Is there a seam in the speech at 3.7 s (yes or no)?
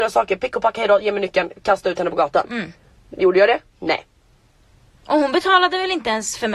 no